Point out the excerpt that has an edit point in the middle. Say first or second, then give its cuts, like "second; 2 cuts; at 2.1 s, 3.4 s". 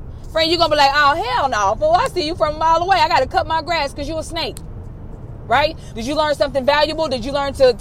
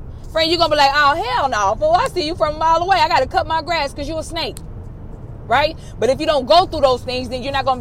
first; 1 cut; at 5.9 s